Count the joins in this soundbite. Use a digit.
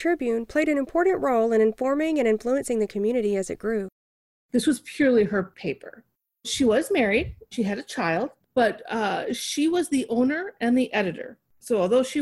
0